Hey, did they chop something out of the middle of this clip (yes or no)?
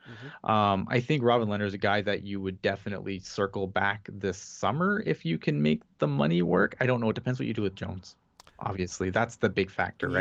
no